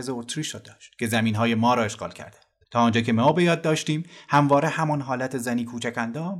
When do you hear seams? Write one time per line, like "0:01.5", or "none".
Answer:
0:02.7